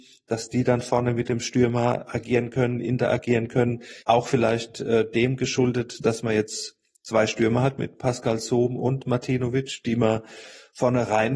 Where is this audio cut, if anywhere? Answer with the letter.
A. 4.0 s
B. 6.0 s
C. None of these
A